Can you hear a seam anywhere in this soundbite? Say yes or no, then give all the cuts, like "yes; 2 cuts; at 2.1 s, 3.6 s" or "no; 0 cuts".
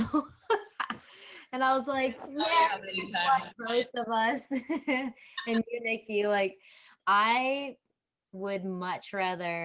no; 0 cuts